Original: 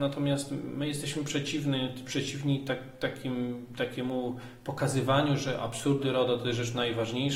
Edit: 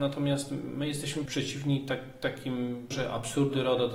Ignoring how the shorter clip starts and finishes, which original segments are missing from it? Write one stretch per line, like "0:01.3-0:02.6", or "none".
0:01.3-0:02.0
0:03.7-0:05.4

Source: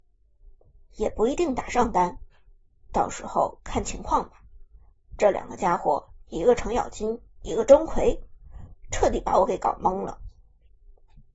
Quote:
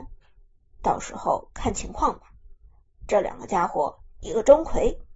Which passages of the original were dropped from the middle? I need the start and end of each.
0:06.2-0:07.3

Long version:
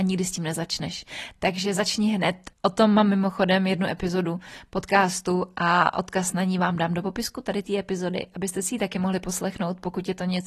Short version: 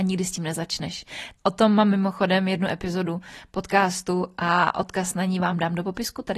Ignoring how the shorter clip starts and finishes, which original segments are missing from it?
0:01.4-0:02.5

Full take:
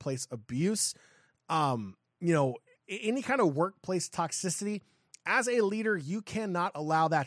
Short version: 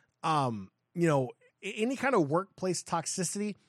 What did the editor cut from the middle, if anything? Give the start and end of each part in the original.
none

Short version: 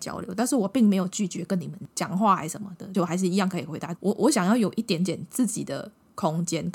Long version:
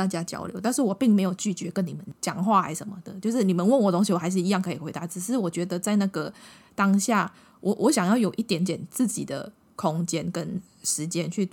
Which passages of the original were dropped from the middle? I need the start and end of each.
0:03.2-0:04.1
0:05.1-0:07.6

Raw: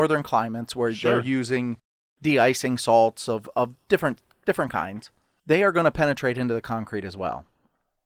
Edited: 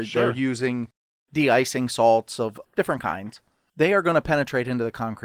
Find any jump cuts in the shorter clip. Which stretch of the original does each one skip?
0:03.5-0:04.3

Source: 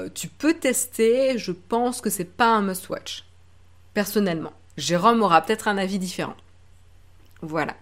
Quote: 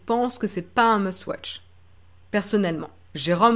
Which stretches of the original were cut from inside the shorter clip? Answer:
none

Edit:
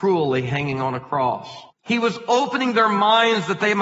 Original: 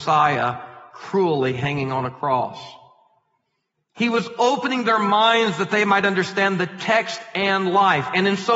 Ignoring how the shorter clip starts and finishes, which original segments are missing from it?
0:02.8-0:03.8

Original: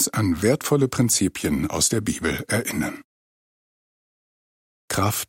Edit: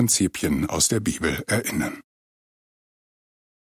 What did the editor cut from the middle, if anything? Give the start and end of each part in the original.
none

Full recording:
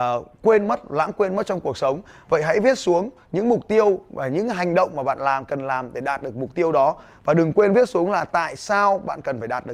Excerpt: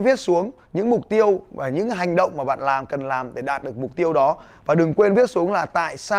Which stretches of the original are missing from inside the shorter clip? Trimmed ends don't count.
none

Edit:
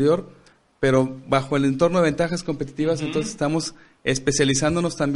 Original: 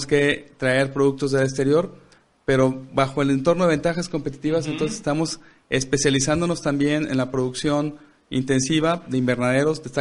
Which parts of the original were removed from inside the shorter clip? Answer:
none

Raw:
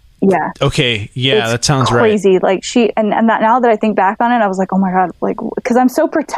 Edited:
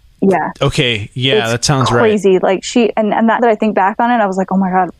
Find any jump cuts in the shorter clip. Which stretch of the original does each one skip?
0:03.4-0:03.6

